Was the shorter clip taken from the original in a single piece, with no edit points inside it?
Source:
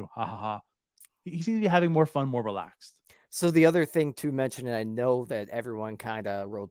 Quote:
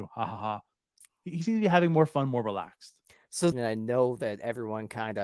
no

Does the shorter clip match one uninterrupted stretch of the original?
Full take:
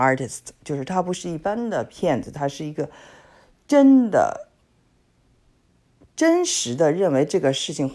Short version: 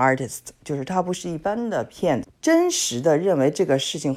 no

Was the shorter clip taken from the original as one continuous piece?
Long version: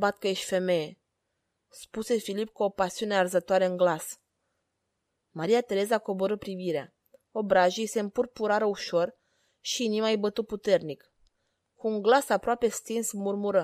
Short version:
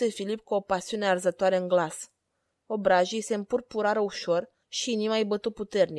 no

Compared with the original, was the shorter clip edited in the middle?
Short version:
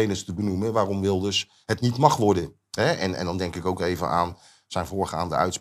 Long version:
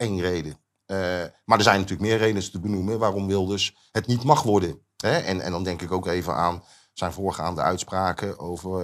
no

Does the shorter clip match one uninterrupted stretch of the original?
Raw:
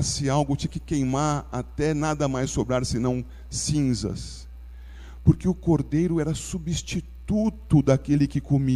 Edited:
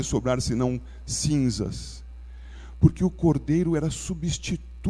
yes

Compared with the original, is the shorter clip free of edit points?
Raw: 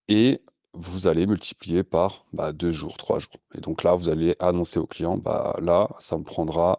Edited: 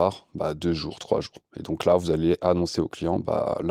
yes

